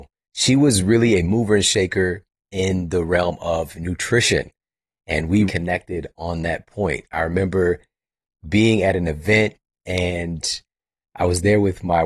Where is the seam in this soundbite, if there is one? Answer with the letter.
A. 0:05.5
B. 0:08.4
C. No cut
A